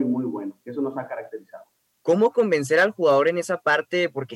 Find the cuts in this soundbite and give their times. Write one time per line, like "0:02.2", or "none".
0:01.9